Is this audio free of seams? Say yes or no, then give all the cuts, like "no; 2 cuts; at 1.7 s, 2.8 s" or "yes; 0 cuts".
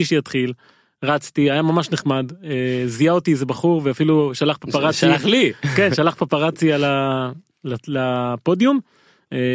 yes; 0 cuts